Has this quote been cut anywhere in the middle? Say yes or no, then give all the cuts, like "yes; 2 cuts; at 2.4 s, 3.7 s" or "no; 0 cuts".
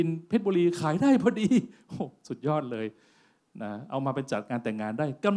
no; 0 cuts